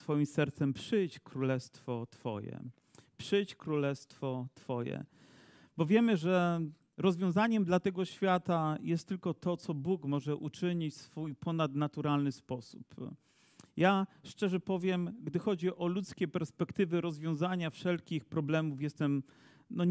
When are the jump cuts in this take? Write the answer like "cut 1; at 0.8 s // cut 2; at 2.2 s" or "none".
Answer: none